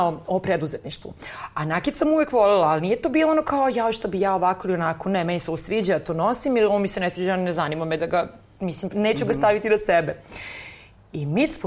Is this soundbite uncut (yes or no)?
no